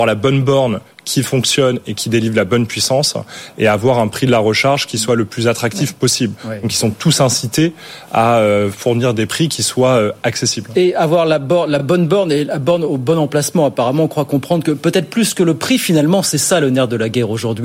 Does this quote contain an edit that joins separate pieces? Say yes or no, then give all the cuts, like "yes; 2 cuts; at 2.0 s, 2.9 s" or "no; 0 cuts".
no; 0 cuts